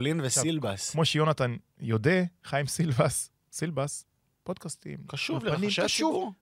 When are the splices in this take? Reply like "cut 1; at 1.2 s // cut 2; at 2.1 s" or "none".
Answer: cut 1; at 4.4 s